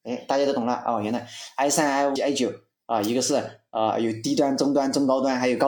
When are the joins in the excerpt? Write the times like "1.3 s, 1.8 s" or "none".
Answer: 2.2 s